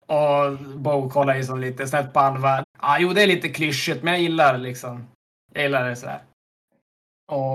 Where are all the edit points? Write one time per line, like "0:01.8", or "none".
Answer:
0:02.6

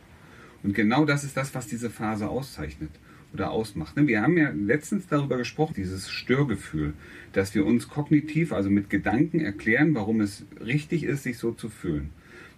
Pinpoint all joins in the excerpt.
0:05.7

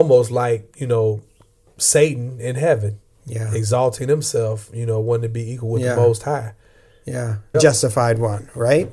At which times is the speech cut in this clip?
0:07.5

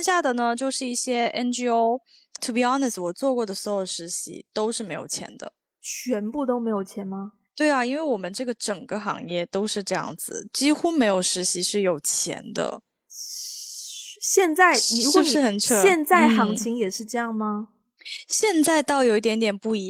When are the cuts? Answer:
0:02.4

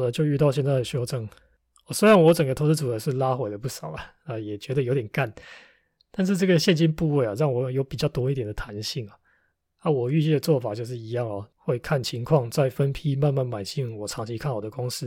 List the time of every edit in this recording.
none

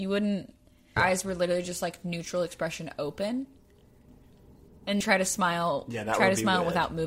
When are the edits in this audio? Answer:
0:01.0
0:05.0

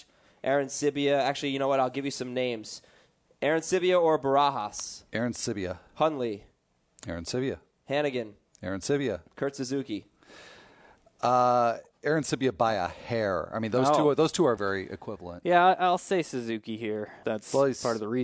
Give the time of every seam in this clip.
0:14.6
0:17.2

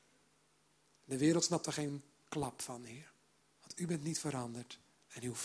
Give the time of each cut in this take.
0:03.4

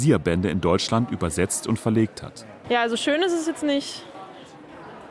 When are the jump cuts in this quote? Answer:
0:02.6

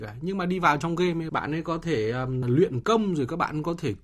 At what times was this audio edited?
0:01.3
0:02.4

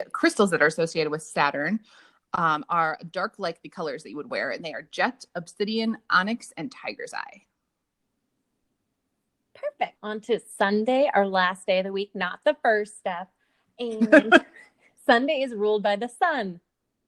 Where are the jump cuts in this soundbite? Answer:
0:10.0

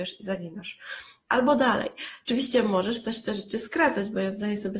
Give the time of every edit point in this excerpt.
0:02.2

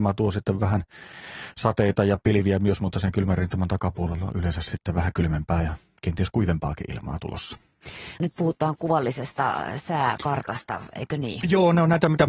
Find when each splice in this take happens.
0:08.2

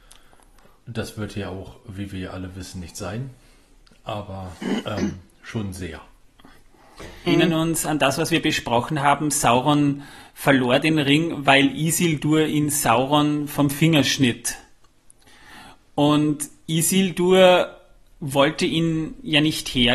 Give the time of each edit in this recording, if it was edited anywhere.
0:07.3

